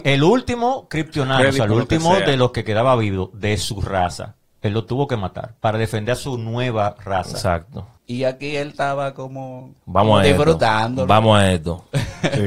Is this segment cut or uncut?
cut